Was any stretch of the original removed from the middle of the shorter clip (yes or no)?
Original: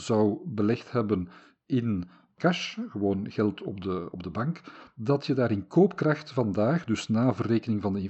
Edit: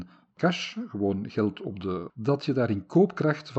yes